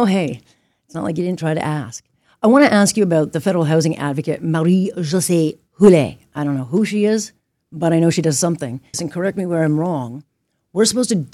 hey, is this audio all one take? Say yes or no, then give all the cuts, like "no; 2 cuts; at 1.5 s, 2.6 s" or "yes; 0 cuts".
no; 1 cut; at 8.9 s